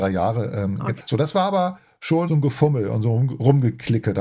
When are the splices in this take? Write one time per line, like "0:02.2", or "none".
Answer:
0:01.0